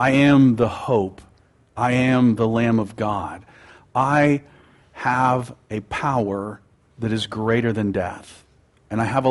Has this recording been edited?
no; 0 cuts

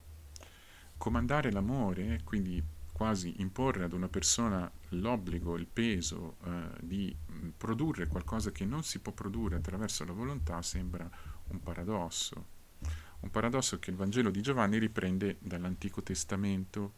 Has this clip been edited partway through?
yes; 1 cut; at 0.9 s

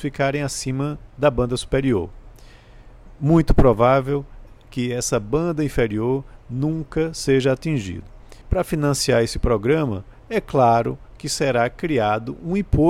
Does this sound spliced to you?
yes; 1 cut; at 8.4 s

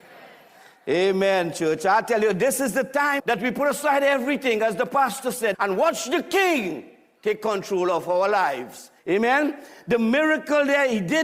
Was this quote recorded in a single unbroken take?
no; 3 cuts; at 3.2 s, 5.5 s, 9.0 s

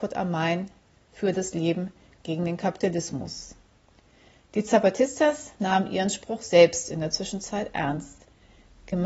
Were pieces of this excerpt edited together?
no; 0 cuts

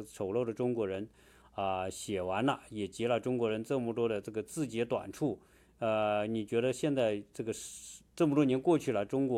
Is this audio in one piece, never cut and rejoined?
yes; 0 cuts

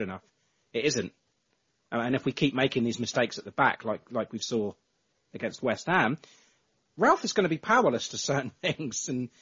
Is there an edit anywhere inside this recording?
no; 0 cuts

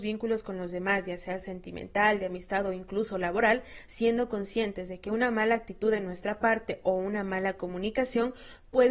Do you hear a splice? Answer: yes; 1 cut; at 3.9 s

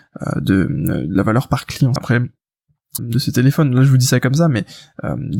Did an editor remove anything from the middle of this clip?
yes; 2 cuts; at 2.0 s, 3.0 s

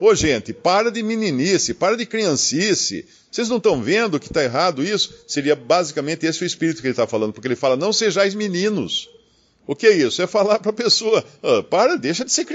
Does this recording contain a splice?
no; 0 cuts

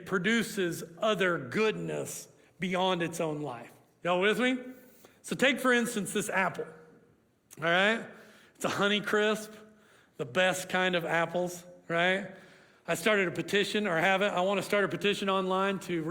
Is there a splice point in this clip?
no; 0 cuts

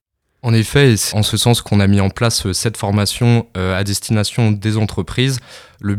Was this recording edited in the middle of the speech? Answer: yes; 1 cut; at 1.1 s

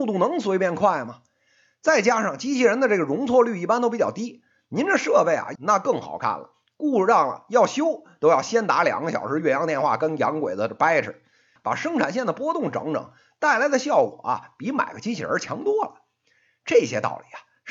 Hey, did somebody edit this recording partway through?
yes; 2 cuts; at 5.6 s, 11.6 s

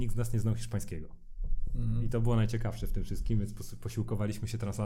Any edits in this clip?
no; 0 cuts

